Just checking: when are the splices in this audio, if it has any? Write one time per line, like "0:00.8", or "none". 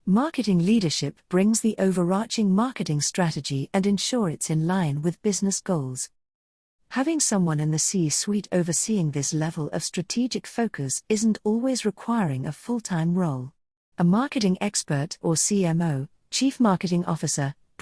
0:13.9
0:15.2